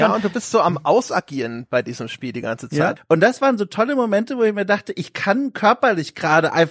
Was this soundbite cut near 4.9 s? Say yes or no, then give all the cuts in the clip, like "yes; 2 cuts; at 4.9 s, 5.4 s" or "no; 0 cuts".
no; 1 cut; at 3.0 s